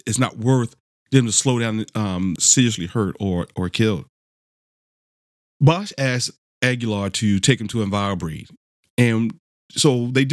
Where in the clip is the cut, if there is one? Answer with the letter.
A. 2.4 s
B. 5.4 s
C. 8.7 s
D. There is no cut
A